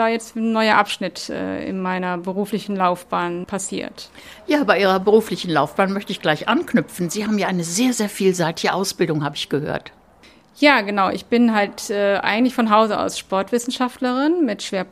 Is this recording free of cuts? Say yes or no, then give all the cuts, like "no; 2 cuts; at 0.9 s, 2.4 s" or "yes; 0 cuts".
yes; 0 cuts